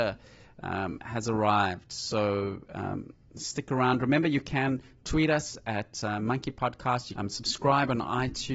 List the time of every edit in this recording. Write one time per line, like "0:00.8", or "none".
0:07.1